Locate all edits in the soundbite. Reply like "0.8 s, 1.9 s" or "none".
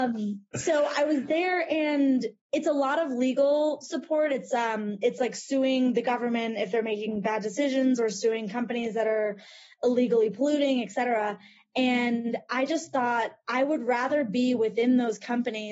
none